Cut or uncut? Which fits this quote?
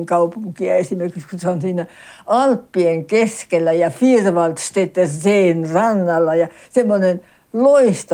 uncut